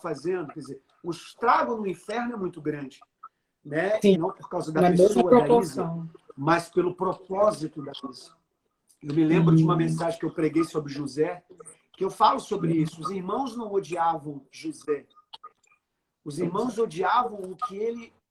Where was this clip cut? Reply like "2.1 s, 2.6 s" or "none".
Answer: 4.1 s